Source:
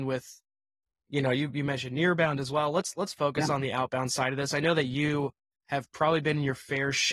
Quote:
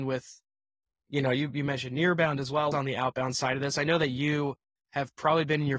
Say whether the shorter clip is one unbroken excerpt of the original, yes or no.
no